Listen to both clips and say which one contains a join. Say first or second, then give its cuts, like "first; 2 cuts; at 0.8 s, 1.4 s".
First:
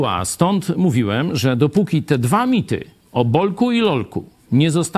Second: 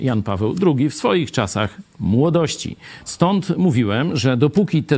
second; 1 cut; at 3.1 s